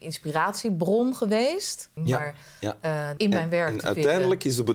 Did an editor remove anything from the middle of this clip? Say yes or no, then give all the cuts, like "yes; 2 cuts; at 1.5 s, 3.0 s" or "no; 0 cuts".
yes; 2 cuts; at 2.0 s, 3.2 s